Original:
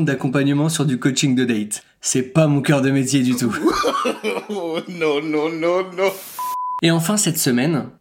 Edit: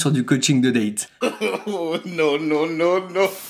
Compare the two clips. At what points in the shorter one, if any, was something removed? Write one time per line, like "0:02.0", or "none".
0:01.2